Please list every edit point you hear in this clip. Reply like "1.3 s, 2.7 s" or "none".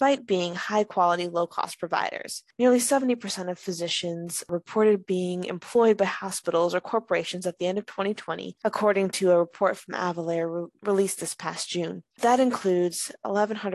none